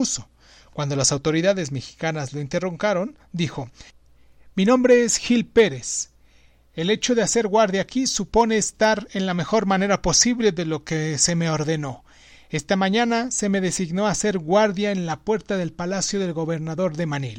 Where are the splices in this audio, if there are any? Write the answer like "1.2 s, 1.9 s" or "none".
none